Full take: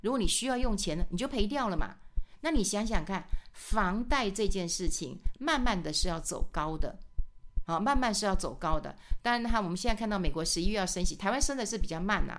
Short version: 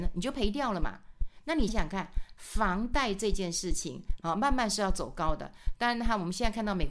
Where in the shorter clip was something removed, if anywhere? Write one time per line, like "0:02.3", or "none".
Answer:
0:01.7
0:04.2